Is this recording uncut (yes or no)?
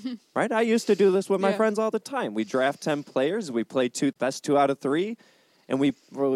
no